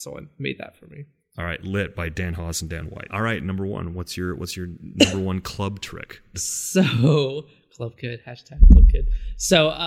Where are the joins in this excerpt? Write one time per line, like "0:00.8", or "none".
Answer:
0:03.1
0:06.3